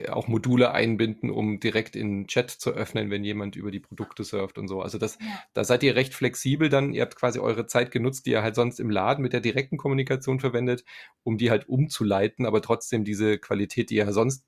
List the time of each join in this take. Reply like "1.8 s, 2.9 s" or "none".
none